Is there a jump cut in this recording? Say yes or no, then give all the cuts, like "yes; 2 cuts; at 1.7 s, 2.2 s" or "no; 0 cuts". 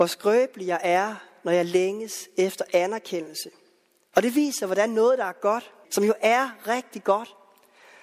yes; 2 cuts; at 4.1 s, 5.8 s